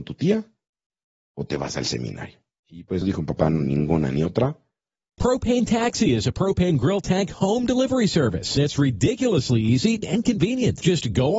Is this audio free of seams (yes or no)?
no